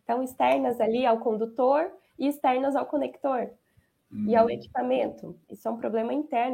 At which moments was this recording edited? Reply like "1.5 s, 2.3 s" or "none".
5.4 s